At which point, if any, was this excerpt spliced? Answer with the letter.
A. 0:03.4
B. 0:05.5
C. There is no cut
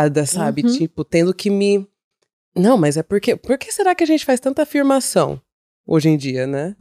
C